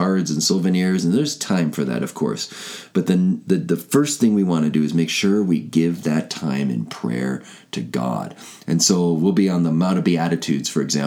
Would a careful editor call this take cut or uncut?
uncut